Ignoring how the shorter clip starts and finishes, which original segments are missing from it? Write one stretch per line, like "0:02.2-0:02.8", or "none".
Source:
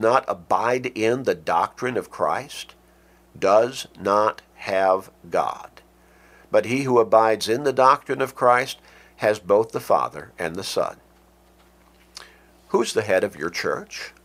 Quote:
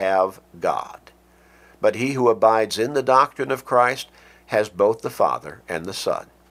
none